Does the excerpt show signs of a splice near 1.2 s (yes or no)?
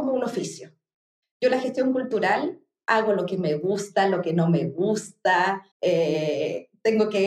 yes